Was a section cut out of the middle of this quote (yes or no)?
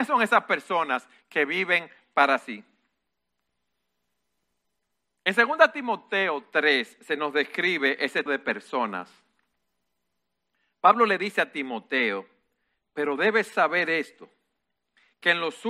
yes